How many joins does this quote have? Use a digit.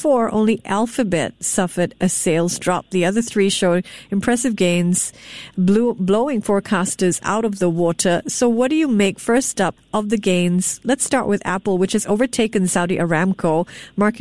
0